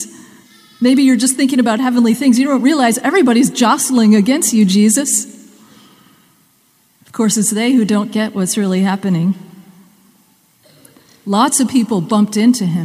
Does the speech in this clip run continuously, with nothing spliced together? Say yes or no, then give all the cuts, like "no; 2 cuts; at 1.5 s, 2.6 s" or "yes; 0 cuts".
yes; 0 cuts